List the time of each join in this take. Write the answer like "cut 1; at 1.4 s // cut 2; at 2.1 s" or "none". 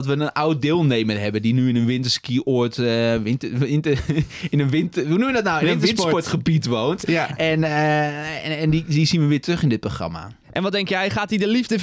none

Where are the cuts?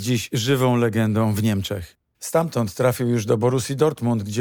cut 1; at 2.1 s

